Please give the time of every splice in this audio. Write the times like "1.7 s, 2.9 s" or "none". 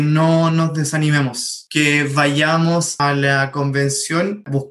3.0 s